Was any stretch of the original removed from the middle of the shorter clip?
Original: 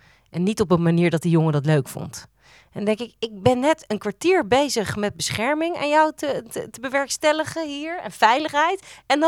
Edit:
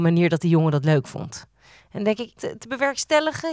yes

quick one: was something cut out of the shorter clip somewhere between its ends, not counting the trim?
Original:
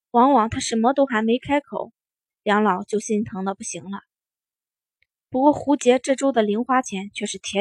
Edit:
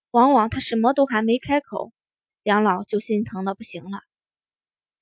no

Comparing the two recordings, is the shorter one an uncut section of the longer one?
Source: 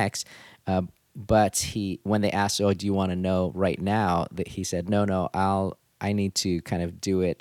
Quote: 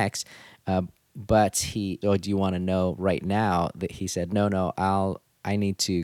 no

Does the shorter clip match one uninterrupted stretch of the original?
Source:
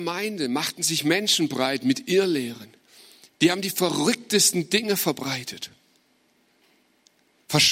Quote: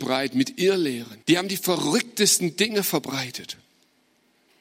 no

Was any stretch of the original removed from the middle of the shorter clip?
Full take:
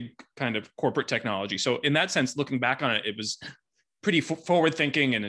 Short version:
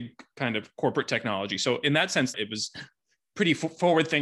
yes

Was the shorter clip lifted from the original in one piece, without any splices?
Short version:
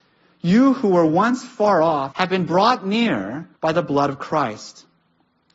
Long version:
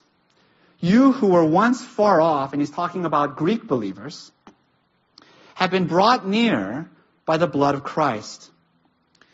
no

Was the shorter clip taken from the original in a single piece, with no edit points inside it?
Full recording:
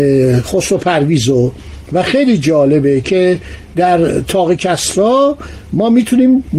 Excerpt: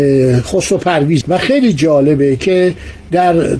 no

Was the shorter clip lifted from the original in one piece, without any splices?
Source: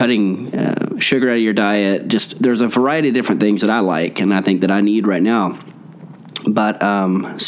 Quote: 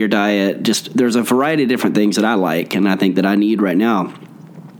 yes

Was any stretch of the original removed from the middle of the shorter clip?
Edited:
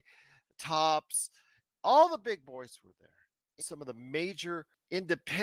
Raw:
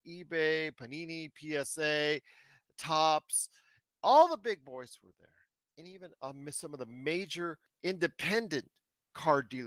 yes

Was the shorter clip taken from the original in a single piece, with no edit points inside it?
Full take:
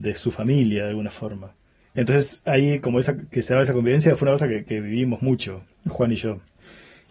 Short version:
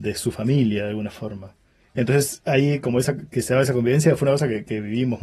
yes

